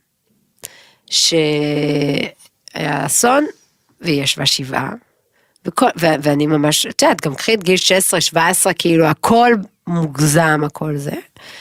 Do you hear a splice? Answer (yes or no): no